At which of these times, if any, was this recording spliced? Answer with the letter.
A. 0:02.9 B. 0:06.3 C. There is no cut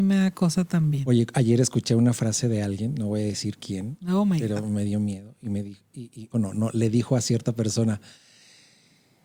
B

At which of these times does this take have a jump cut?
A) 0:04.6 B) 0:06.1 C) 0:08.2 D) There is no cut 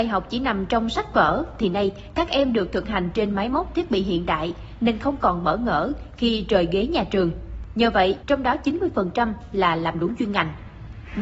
C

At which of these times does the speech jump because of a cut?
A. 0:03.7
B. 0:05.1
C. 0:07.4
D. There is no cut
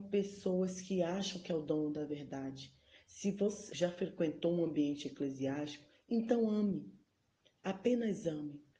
A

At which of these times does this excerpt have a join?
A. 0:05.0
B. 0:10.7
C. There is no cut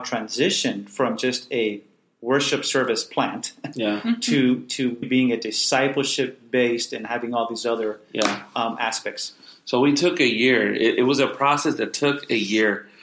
A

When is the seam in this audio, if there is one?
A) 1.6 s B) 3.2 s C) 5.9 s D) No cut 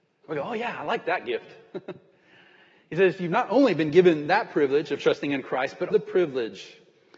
C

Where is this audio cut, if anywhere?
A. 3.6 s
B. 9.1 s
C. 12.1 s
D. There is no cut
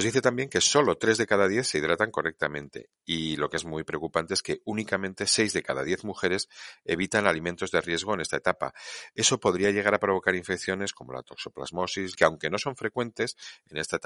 C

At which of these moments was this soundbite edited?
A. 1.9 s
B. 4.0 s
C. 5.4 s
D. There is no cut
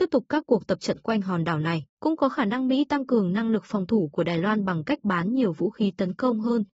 A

